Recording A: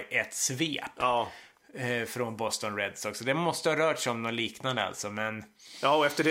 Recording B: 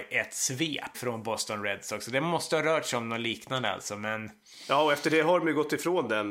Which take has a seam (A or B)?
B